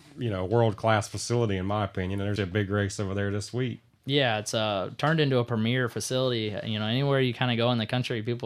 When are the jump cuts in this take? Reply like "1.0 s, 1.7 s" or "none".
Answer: 2.4 s